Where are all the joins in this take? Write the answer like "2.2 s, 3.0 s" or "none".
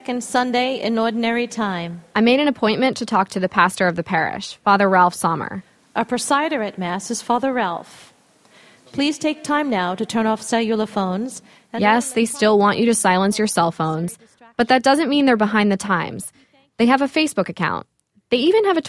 none